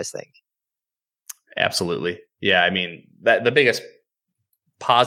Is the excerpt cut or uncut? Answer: uncut